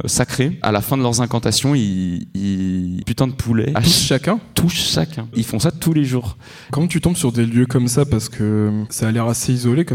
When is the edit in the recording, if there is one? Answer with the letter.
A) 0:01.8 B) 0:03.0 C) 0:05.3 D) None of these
B